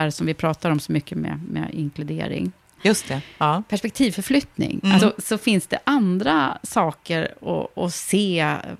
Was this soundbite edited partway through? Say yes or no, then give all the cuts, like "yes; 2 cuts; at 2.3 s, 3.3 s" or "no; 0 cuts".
yes; 2 cuts; at 2.8 s, 5.0 s